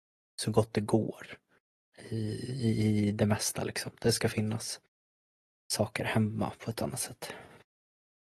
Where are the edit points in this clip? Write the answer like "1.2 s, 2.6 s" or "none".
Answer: none